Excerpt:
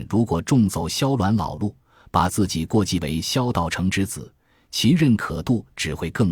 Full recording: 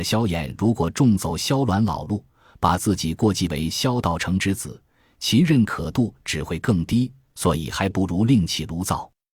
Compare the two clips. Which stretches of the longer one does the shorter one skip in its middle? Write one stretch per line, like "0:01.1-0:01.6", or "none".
none